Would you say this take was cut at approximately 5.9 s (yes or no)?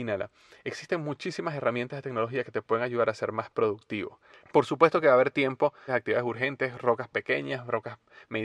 yes